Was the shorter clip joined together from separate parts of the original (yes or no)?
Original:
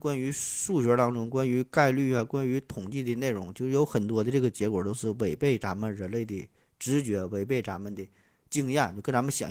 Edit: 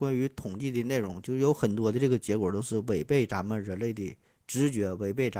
no